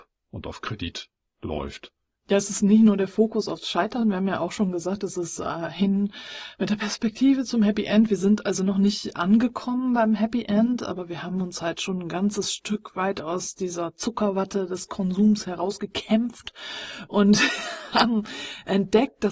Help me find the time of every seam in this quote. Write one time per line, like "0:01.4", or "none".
none